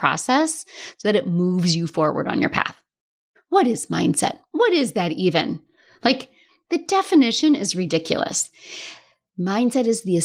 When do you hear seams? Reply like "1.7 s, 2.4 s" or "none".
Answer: 3.4 s